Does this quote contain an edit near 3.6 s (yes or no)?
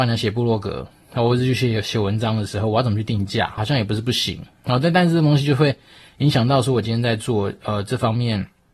yes